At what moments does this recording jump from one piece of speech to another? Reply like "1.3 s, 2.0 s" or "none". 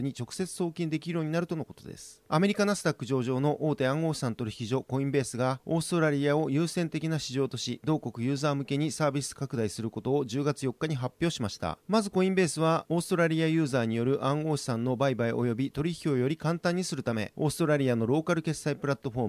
2.3 s